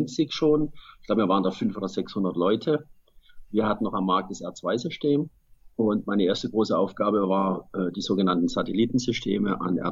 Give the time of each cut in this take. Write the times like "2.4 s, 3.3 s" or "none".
none